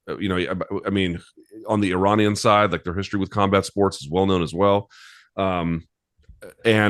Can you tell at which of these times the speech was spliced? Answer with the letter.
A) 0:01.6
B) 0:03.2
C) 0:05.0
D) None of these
D